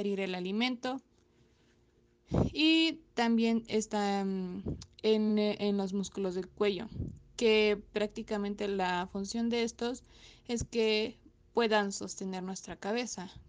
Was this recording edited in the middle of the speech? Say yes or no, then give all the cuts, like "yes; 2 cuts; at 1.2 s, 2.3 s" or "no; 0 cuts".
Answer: no; 0 cuts